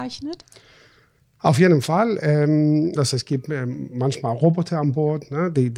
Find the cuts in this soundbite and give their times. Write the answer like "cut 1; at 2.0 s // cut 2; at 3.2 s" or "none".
cut 1; at 2.9 s